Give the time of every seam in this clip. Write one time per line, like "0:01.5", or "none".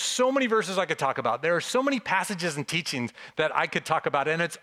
none